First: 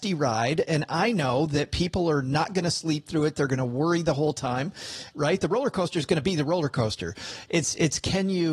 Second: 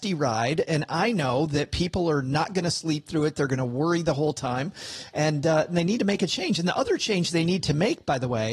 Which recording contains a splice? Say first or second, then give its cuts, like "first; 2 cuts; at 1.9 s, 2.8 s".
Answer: first; 1 cut; at 5.1 s